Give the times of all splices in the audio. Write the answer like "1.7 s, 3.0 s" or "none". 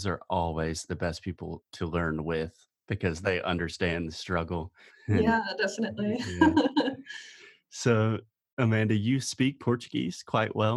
4.9 s